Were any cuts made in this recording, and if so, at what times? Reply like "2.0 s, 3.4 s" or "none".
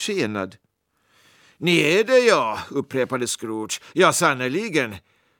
none